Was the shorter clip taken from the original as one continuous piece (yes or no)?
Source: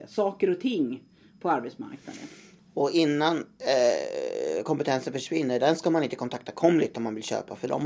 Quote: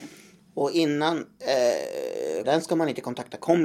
no